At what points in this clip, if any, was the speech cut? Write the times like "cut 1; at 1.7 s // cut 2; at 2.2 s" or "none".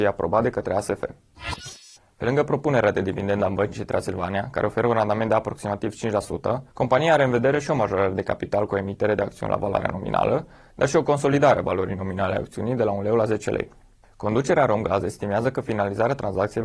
cut 1; at 6.7 s // cut 2; at 14.0 s